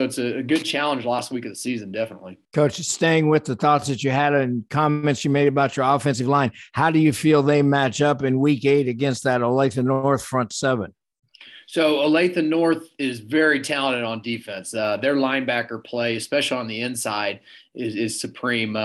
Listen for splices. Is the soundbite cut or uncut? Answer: cut